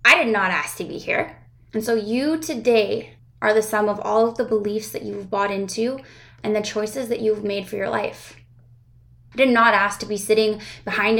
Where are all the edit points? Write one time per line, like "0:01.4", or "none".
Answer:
0:01.7
0:03.2
0:09.3